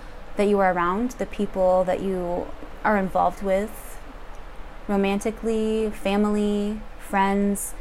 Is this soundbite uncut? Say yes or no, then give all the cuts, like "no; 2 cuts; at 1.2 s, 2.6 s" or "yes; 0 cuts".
yes; 0 cuts